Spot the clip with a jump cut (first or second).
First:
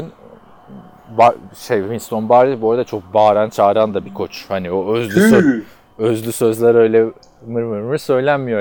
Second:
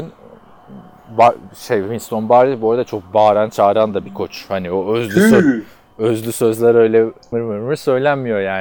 second